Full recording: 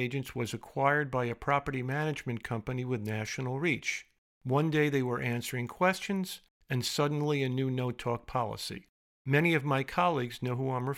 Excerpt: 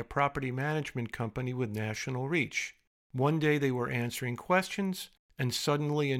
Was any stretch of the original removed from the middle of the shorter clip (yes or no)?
no